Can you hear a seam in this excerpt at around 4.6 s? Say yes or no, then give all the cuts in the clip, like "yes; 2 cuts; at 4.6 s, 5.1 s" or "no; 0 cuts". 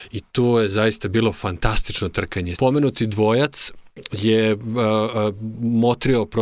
no; 1 cut; at 2.5 s